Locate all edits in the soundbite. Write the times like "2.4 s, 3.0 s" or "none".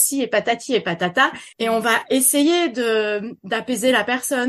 1.5 s